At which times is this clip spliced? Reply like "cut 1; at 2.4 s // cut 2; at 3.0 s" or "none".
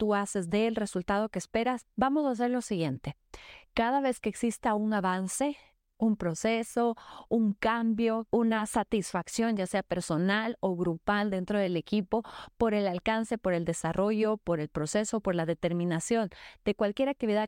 none